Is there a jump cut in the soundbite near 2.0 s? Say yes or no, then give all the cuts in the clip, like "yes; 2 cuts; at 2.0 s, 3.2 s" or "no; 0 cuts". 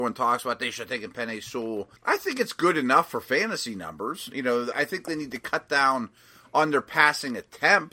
yes; 2 cuts; at 2.0 s, 4.7 s